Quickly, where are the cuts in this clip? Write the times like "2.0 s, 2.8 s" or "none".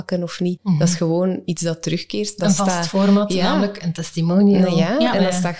none